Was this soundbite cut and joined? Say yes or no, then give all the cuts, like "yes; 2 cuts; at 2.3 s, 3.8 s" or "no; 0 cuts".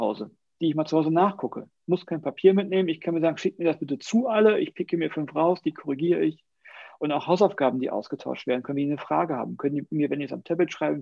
no; 0 cuts